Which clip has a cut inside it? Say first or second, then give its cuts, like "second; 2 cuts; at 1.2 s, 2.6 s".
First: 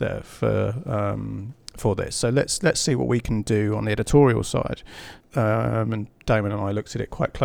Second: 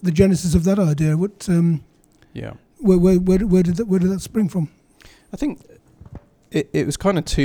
first; 1 cut; at 5.2 s